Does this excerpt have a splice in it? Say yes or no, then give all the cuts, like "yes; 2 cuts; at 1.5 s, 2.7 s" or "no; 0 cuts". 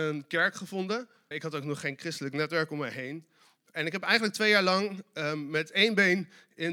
yes; 1 cut; at 1.3 s